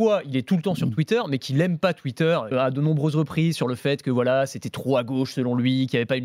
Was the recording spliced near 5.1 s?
no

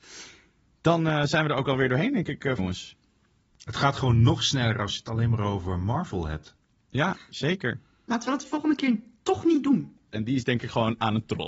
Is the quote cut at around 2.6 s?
yes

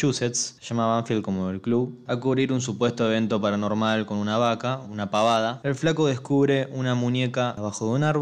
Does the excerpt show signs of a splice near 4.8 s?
yes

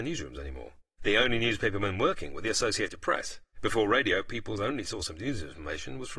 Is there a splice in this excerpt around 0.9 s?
no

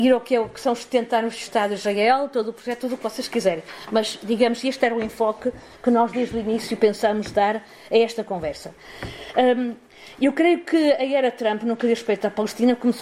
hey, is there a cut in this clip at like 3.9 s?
no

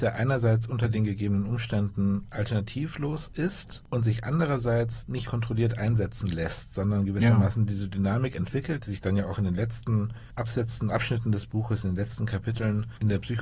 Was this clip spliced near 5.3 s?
yes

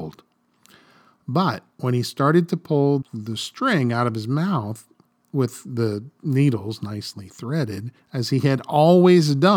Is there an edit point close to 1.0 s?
no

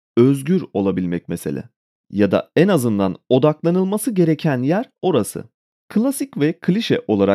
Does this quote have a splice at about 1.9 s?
no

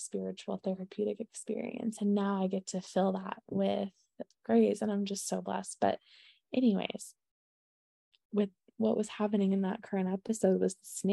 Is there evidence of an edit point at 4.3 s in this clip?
yes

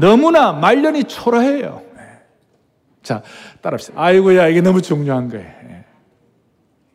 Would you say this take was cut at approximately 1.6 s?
no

